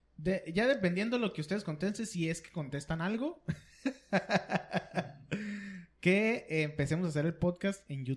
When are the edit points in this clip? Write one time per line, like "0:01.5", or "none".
none